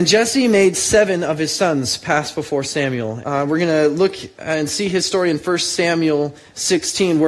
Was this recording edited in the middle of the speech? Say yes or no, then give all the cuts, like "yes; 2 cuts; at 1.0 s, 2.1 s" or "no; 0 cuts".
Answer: yes; 1 cut; at 3.2 s